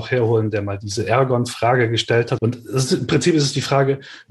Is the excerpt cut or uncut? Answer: cut